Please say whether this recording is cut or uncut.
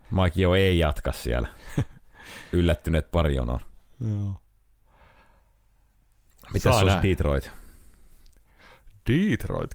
uncut